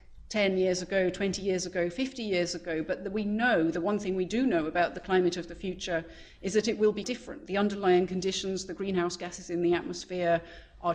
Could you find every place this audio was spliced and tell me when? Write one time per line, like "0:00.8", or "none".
0:07.0